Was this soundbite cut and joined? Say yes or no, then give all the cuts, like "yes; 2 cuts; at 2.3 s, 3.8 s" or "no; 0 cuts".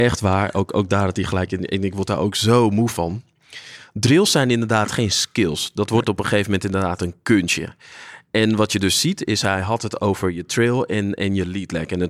no; 0 cuts